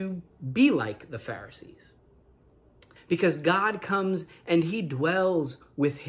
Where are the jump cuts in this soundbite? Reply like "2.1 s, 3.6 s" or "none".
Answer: 3.0 s